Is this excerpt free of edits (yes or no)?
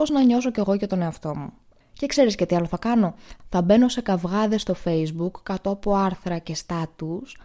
no